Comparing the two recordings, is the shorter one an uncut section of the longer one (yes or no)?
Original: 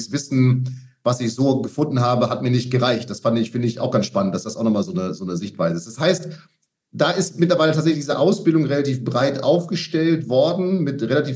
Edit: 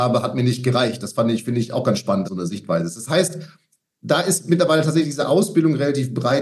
no